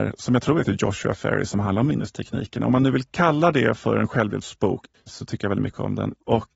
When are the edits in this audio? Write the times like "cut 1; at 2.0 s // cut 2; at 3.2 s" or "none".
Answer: cut 1; at 4.9 s